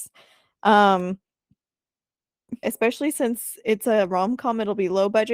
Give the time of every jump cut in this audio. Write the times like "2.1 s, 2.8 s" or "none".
2.6 s